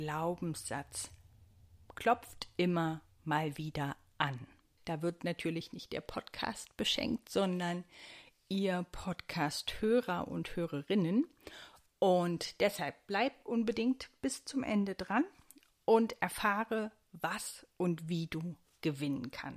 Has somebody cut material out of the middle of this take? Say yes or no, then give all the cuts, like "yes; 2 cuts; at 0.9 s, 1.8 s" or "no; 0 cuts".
yes; 1 cut; at 4.8 s